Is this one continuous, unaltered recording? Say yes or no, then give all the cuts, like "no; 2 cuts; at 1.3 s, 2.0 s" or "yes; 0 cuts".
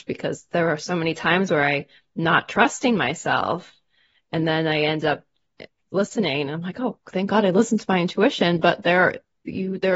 yes; 0 cuts